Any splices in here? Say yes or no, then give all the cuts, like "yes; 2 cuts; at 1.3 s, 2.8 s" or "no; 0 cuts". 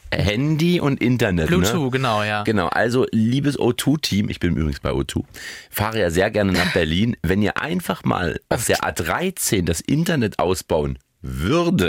no; 0 cuts